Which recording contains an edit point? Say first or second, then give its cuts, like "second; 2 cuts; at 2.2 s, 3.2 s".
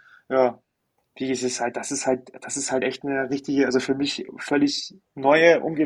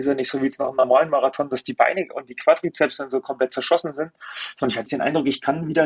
second; 1 cut; at 4.9 s